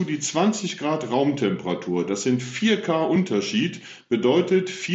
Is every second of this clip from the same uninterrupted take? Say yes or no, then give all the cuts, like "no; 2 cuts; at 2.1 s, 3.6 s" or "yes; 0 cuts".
yes; 0 cuts